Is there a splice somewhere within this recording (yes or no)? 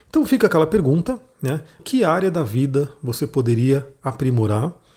yes